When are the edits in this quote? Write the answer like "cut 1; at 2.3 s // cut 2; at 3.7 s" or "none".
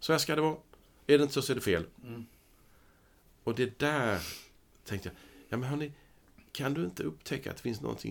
none